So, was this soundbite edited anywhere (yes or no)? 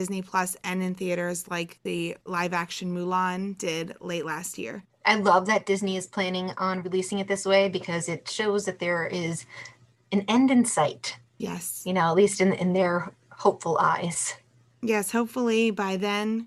no